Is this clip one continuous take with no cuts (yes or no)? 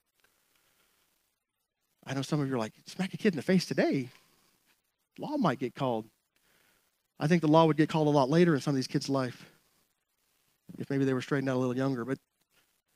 yes